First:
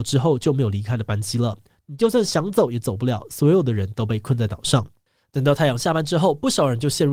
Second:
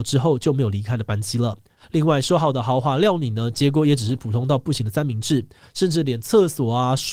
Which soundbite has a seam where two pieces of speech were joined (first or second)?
second